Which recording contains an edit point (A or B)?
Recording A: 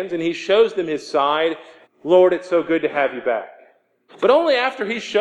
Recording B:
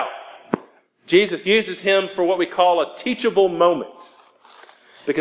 A